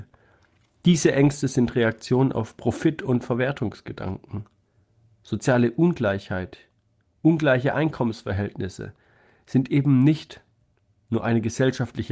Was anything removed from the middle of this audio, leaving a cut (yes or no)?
no